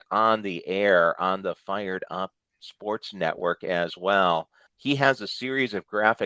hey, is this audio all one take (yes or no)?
no